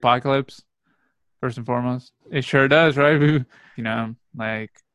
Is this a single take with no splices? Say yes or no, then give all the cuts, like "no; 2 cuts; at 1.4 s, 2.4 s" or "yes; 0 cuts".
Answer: no; 2 cuts; at 2.2 s, 3.7 s